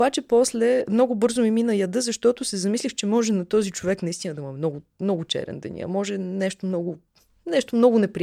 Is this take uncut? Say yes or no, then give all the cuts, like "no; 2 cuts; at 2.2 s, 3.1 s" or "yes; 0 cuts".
yes; 0 cuts